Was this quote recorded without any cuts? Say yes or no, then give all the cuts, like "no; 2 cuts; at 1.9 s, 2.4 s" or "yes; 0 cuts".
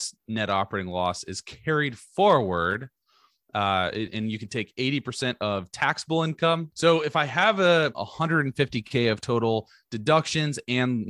no; 1 cut; at 7.9 s